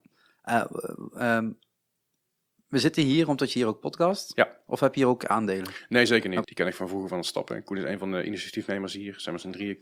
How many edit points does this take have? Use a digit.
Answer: 1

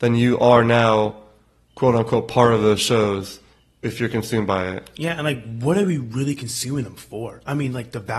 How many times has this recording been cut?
0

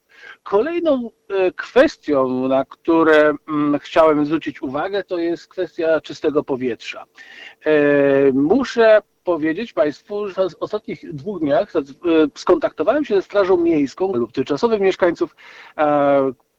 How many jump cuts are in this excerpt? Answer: 2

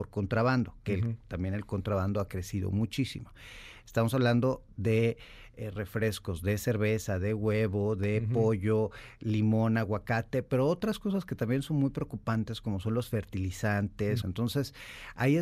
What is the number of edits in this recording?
1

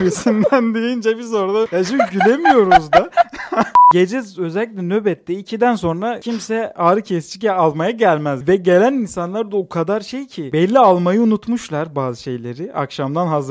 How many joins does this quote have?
0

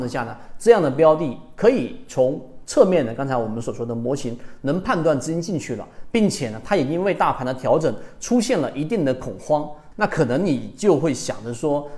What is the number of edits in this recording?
1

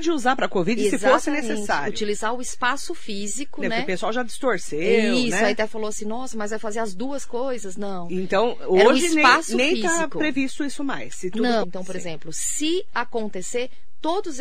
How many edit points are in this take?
1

